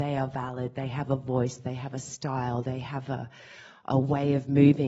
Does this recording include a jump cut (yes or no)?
no